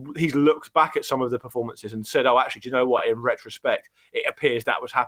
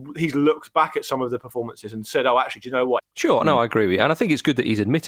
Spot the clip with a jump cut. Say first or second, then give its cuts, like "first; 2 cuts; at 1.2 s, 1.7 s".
second; 1 cut; at 3.0 s